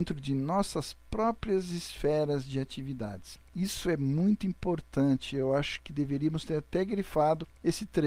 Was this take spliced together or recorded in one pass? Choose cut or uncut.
uncut